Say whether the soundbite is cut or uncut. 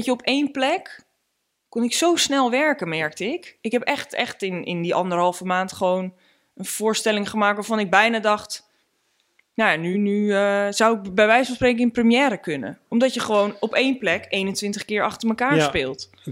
cut